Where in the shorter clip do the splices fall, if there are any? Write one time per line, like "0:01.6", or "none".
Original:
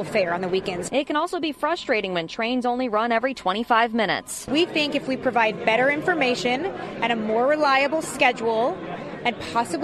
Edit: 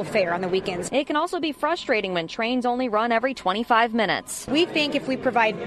none